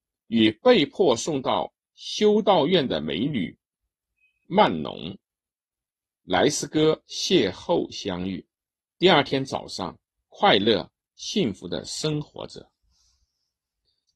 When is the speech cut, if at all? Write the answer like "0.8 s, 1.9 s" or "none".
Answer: 8.9 s, 10.1 s